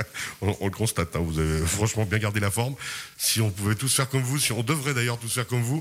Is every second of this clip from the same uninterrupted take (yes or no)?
yes